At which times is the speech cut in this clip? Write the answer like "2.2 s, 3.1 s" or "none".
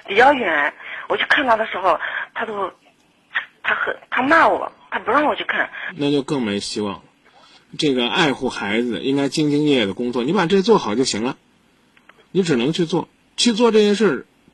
5.9 s, 7.6 s, 12.3 s